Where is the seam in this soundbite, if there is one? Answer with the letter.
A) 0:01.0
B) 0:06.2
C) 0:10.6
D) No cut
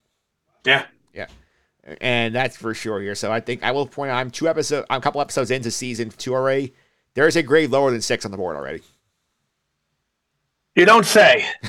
B